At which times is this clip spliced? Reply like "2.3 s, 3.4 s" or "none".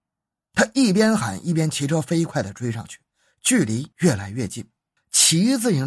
5.0 s